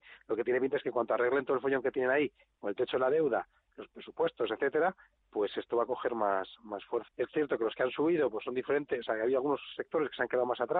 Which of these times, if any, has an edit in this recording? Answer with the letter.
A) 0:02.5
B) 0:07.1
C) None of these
B